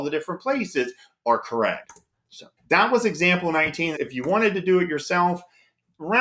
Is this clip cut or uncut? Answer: cut